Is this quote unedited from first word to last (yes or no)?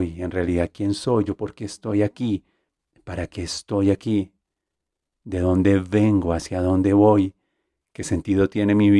yes